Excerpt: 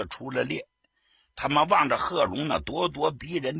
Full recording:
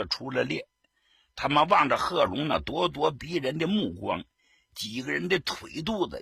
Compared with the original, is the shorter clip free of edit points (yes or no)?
yes